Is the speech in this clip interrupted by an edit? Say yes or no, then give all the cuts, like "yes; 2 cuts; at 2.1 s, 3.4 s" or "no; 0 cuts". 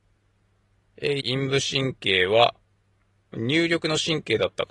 yes; 1 cut; at 1.2 s